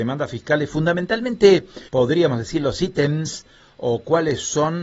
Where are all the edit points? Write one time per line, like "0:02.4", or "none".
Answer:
0:01.9